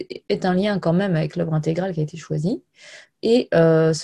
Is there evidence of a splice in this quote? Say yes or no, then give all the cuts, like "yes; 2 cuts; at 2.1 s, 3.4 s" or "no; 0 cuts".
yes; 1 cut; at 3.1 s